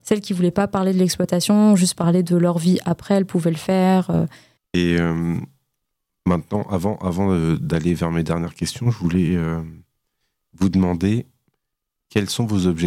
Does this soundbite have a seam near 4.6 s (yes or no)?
yes